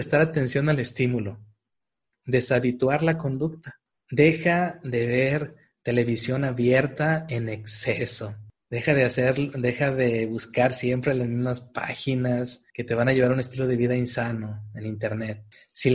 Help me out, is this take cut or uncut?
cut